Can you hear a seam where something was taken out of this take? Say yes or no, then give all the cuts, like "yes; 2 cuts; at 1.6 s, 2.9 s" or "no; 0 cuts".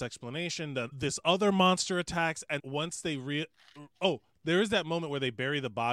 yes; 3 cuts; at 0.9 s, 2.6 s, 3.9 s